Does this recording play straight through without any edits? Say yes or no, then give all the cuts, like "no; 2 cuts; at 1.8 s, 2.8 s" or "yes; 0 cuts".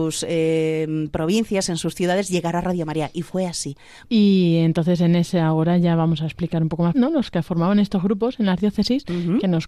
no; 2 cuts; at 4.1 s, 6.9 s